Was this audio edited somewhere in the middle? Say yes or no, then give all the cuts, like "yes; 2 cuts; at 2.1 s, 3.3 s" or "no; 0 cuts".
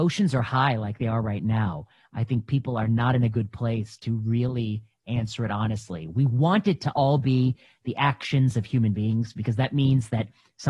no; 0 cuts